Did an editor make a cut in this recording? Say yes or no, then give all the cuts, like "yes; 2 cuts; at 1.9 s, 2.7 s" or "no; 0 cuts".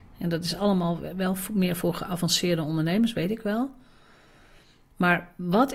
no; 0 cuts